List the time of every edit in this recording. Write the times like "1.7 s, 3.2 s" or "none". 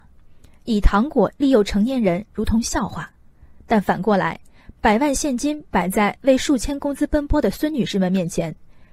none